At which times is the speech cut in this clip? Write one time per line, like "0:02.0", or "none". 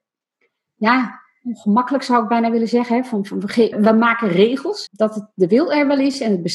0:03.7
0:04.9